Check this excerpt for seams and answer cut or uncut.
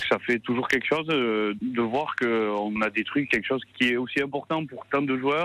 uncut